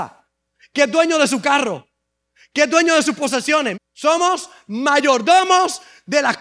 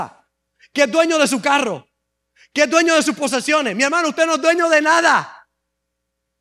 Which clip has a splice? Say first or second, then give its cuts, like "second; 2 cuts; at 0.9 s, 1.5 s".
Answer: first; 1 cut; at 3.7 s